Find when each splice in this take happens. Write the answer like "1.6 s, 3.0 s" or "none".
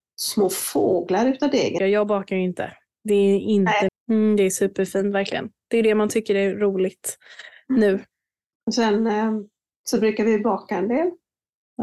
1.8 s, 3.9 s